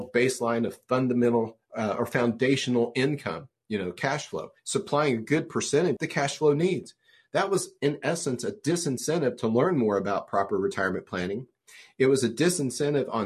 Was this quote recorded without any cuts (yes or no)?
no